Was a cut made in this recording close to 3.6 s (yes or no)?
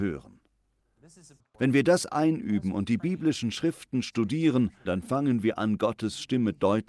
no